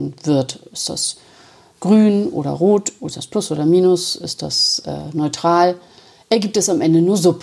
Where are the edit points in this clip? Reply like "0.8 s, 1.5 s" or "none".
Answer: none